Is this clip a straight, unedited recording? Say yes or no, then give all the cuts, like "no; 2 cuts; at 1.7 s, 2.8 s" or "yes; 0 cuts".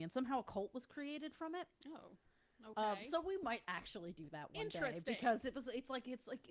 yes; 0 cuts